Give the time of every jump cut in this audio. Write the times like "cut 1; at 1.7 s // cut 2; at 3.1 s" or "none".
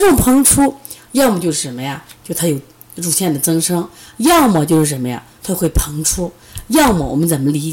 cut 1; at 5.4 s